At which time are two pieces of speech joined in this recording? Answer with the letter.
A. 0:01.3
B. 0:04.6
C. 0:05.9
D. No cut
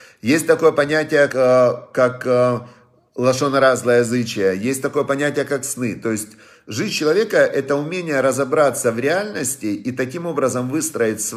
A